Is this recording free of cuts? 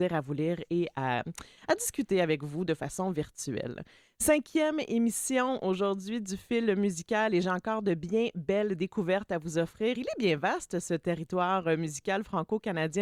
yes; 0 cuts

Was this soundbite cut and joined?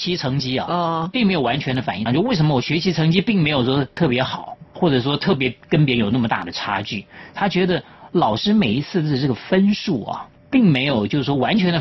yes; 2 cuts; at 2.1 s, 7.4 s

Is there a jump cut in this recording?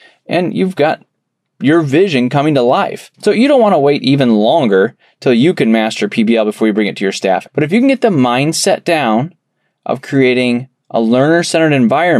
yes; 2 cuts; at 3.1 s, 7.5 s

